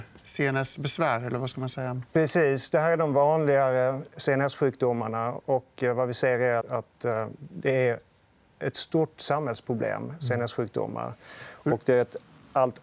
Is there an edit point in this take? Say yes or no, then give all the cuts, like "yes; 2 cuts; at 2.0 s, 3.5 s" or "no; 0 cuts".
yes; 1 cut; at 6.6 s